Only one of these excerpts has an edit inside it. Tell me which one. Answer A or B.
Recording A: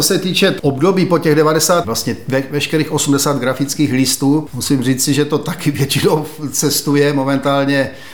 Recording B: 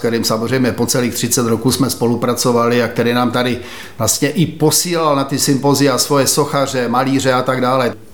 A